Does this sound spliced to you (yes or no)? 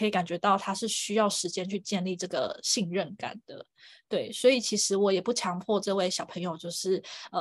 no